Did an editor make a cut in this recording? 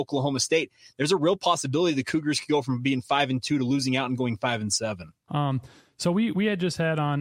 yes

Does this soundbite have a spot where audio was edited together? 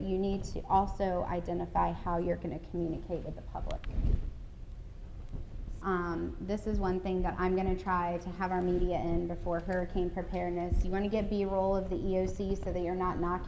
yes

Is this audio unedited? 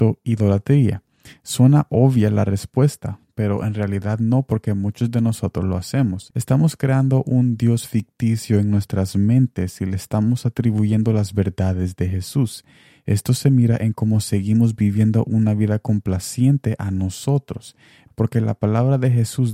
no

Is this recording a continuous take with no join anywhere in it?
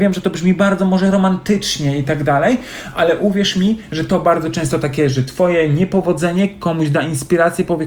yes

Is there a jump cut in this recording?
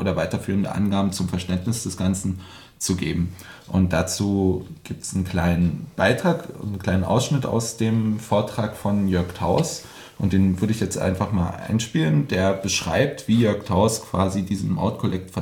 no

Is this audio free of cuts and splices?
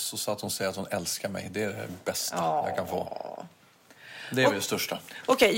yes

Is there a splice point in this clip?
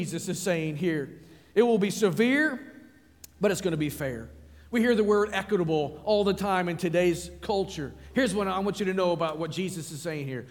no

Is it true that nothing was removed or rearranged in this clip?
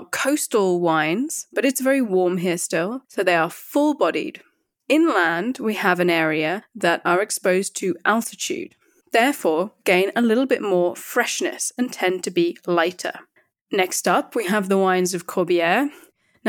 yes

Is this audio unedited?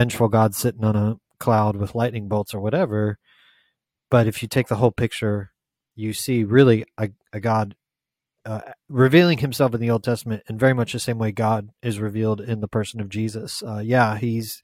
yes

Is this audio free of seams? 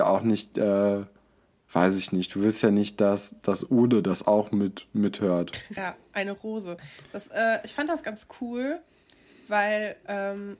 no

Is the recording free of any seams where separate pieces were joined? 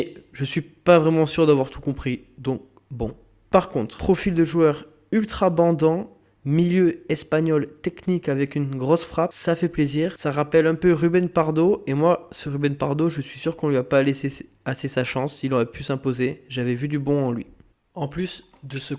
yes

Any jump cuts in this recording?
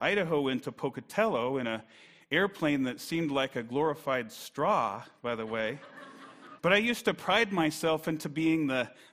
yes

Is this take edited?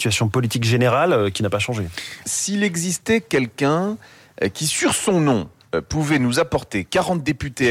yes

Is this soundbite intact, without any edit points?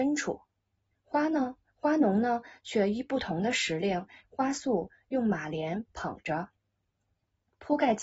no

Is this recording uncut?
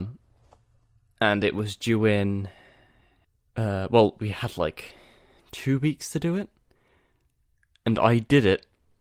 yes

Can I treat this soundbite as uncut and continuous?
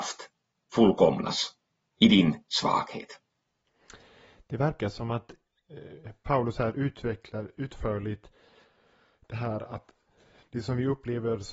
yes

